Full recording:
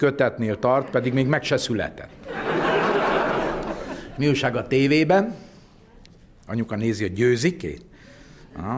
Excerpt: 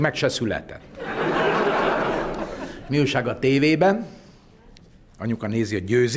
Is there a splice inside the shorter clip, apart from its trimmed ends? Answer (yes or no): no